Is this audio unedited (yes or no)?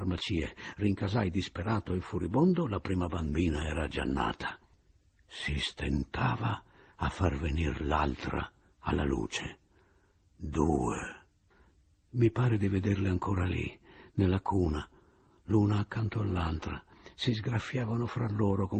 yes